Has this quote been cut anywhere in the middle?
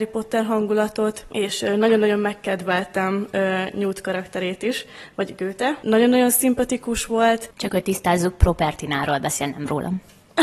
yes; 1 cut; at 7.5 s

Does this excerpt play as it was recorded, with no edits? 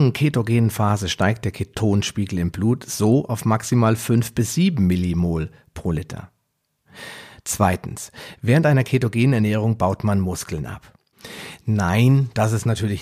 yes; 0 cuts

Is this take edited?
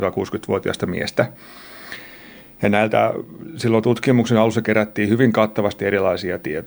no; 0 cuts

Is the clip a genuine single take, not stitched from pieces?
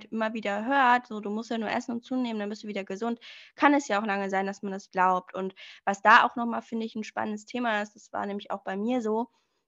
no; 1 cut; at 4.9 s

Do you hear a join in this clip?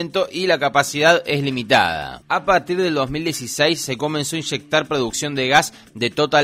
yes; 1 cut; at 2.2 s

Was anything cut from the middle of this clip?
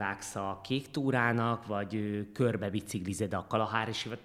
no; 0 cuts

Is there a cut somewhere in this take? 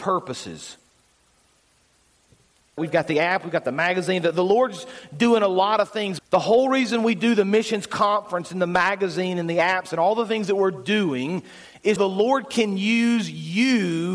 yes; 3 cuts; at 2.8 s, 6.2 s, 12.0 s

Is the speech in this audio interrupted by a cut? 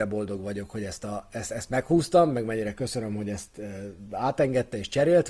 no; 0 cuts

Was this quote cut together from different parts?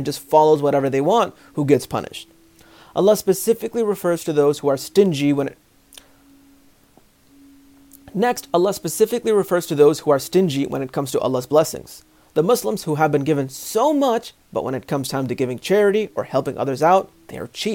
no; 0 cuts

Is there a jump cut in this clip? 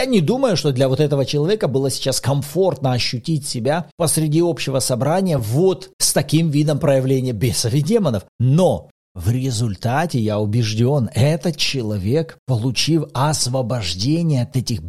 no; 0 cuts

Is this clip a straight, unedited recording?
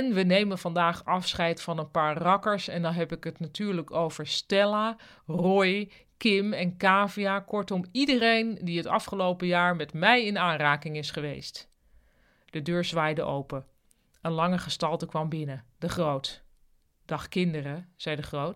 yes; 0 cuts

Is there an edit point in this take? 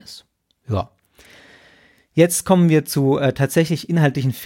no; 0 cuts

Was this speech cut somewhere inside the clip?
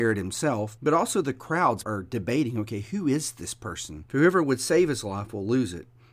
yes; 2 cuts; at 1.8 s, 4.1 s

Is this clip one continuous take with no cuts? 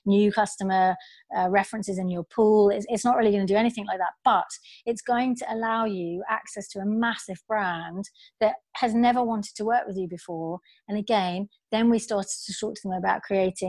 yes; 0 cuts

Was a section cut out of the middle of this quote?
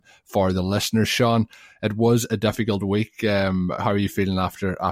yes; 1 cut; at 3.8 s

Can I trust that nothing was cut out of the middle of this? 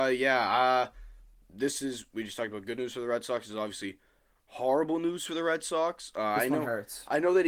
yes; 0 cuts

